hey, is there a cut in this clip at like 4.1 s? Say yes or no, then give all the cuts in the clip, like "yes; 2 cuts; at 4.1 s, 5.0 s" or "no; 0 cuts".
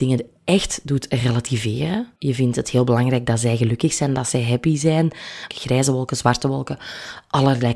no; 2 cuts; at 2.2 s, 5.5 s